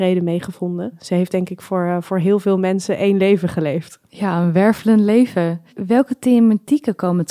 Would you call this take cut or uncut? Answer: uncut